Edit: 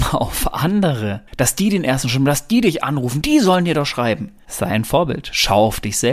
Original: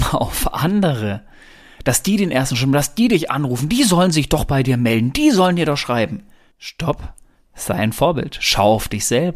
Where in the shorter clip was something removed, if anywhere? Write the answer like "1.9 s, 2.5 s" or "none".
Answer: 1.3 s, 3.2 s, 4.4 s